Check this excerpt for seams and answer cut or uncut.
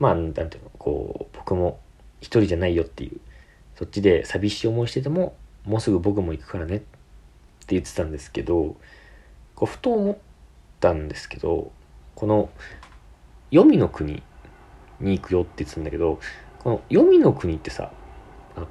uncut